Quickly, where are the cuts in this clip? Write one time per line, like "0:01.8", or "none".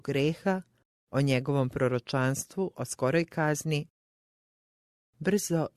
none